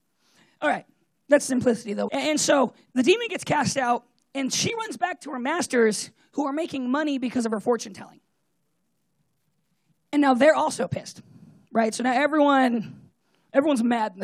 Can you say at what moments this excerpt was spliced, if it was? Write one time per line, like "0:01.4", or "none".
0:02.1